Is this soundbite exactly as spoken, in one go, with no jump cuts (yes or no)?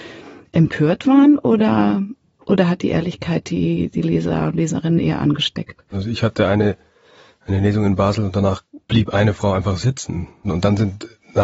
no